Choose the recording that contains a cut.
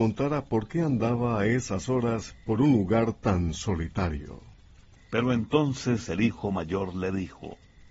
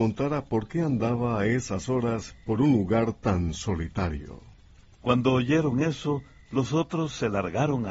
first; 1 cut; at 5.0 s

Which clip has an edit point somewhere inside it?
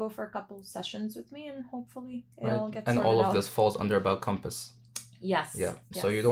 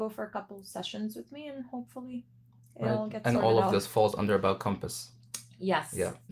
first; 1 cut; at 2.3 s

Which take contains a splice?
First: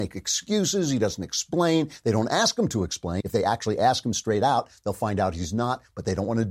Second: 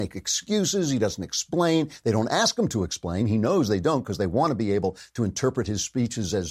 first; 1 cut; at 3.2 s

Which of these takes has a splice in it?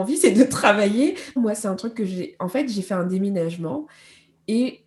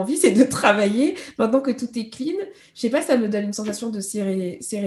first; 1 cut; at 1.4 s

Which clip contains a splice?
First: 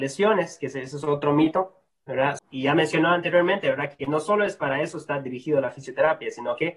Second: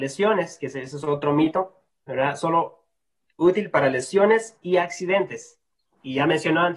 first; 1 cut; at 2.4 s

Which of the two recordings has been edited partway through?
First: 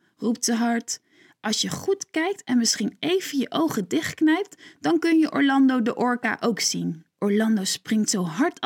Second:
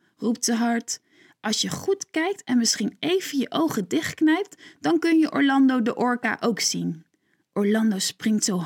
first; 1 cut; at 7.1 s

